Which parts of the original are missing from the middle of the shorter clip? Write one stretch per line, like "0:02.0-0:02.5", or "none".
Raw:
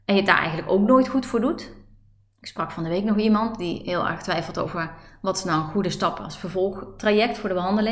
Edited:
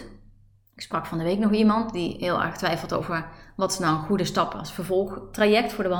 none